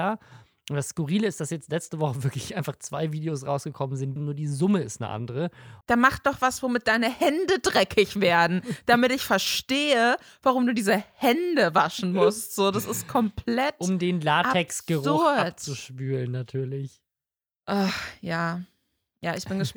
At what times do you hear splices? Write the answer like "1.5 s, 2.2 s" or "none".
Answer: 4.2 s, 5.8 s